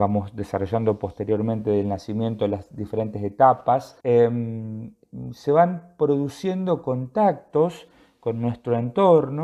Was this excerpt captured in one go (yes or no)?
no